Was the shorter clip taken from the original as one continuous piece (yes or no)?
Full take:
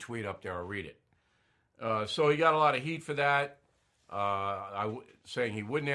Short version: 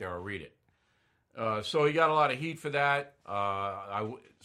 no